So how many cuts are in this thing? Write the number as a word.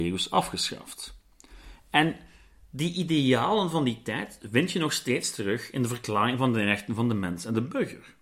zero